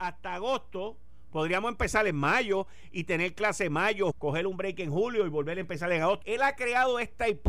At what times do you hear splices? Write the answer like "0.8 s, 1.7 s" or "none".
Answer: 4.1 s, 6.2 s